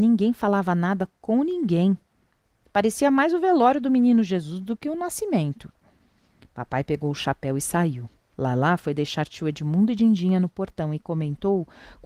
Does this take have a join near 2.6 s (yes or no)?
no